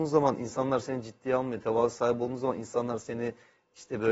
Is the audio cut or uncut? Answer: uncut